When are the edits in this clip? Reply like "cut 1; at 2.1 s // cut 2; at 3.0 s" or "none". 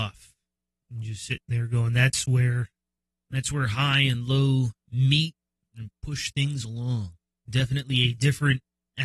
cut 1; at 5.6 s // cut 2; at 7.3 s